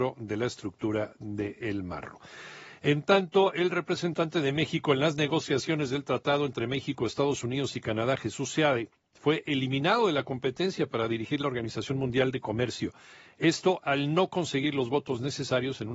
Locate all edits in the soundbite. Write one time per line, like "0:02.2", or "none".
none